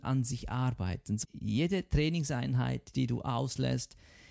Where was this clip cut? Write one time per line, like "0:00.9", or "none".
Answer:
0:01.2
0:02.9